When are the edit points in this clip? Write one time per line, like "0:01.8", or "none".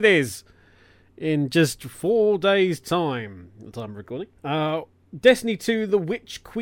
0:04.4